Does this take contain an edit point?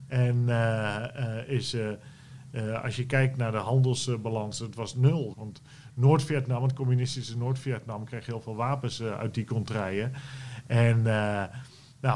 yes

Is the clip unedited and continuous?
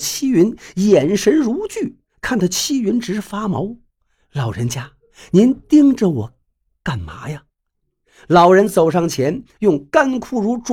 yes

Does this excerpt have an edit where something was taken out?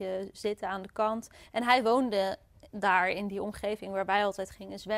no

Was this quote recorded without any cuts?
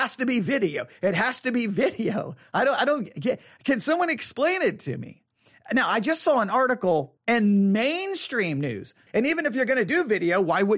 no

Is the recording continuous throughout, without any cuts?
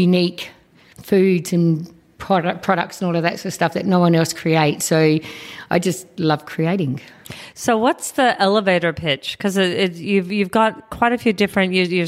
yes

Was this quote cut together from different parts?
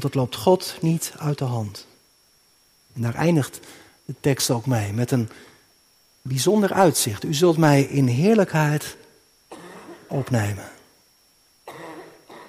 yes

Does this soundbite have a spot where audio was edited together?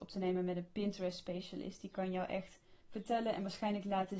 no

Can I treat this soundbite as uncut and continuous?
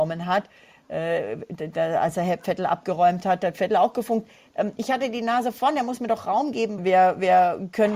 no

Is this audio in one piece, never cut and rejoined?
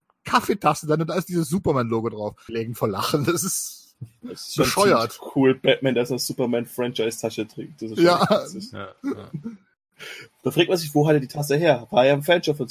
no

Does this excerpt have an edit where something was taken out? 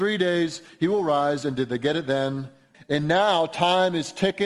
yes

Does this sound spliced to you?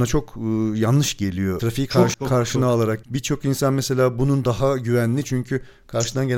yes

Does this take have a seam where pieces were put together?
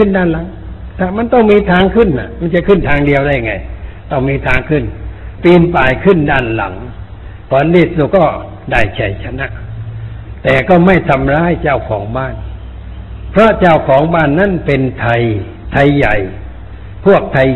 yes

